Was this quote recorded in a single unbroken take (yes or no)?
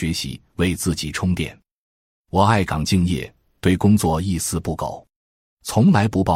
no